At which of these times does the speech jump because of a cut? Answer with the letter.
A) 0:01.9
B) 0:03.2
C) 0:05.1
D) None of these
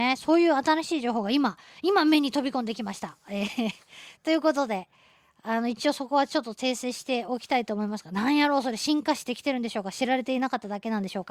D